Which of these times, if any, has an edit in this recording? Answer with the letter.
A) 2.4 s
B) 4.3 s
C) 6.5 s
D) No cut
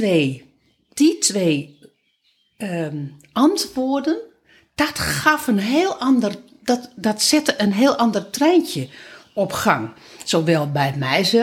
D